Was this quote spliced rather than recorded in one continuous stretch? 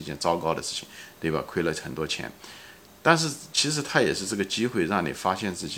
no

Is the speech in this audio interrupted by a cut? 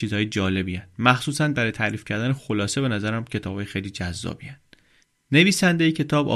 no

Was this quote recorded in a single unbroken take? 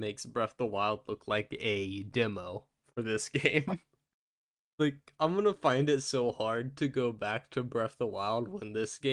yes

